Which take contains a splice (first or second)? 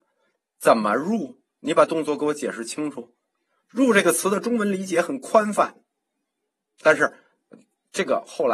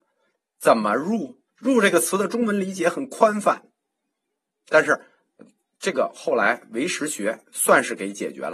second